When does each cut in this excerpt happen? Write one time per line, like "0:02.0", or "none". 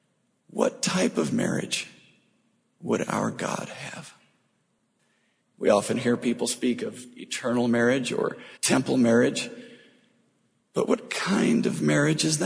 0:05.4
0:08.6